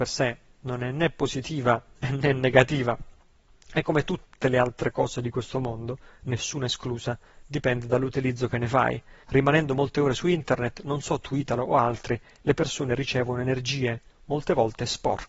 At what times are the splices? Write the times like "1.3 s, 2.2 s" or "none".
9.2 s